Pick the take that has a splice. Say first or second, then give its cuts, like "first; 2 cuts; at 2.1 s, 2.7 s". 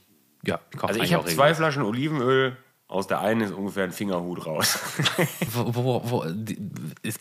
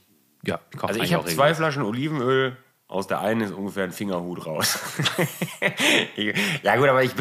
first; 1 cut; at 5.5 s